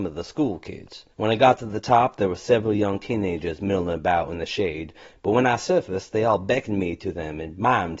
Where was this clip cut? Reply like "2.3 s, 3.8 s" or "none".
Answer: 1.1 s